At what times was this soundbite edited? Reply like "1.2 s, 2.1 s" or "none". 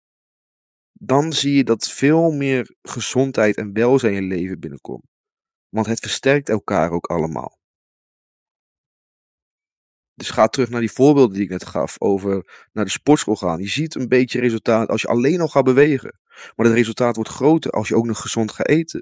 none